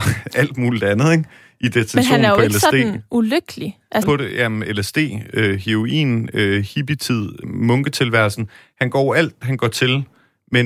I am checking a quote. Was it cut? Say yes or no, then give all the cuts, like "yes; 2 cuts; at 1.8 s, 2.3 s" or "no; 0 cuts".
yes; 3 cuts; at 4.0 s, 7.4 s, 9.4 s